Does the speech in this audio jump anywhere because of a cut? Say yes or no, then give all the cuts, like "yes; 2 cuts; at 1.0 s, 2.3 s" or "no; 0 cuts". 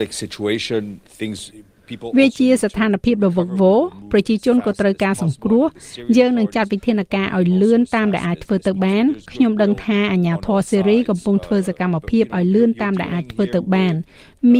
yes; 1 cut; at 1.1 s